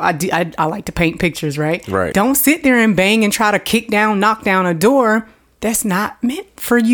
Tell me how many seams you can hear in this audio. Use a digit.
1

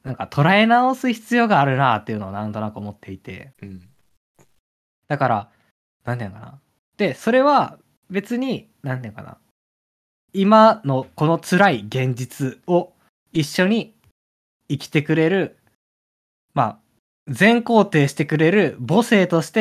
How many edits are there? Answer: 1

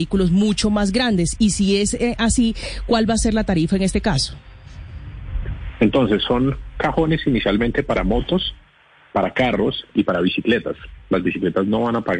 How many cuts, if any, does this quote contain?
0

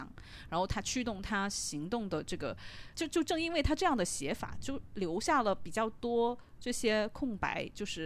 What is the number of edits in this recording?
1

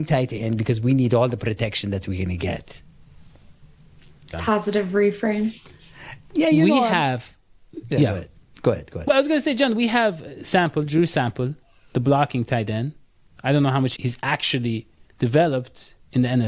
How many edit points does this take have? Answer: 2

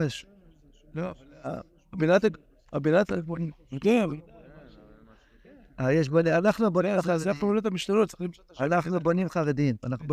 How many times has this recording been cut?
0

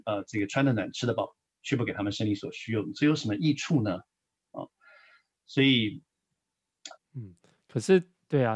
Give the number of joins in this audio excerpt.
1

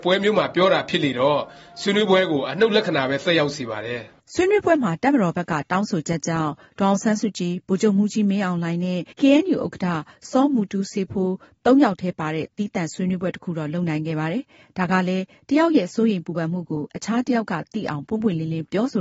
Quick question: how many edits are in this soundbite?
1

